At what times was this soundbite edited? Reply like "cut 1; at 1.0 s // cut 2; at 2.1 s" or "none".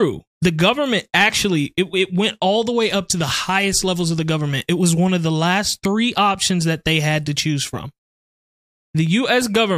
none